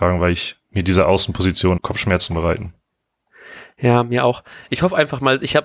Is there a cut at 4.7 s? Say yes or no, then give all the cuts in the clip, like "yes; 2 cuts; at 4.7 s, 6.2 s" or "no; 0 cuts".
no; 1 cut; at 1.8 s